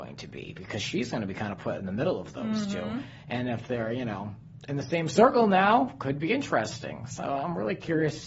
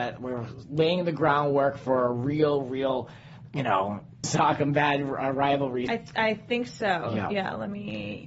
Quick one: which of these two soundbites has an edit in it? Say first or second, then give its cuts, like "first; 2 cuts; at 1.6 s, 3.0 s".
second; 2 cuts; at 4.2 s, 5.9 s